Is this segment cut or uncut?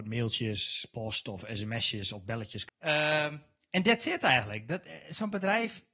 cut